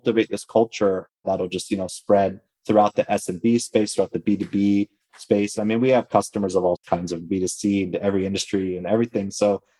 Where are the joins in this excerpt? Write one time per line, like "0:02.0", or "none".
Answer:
none